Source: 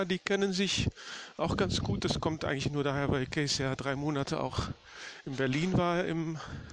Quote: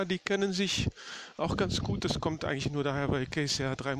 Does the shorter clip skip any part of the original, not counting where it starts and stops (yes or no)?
no